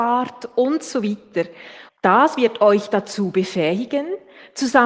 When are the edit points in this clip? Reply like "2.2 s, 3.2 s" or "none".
1.9 s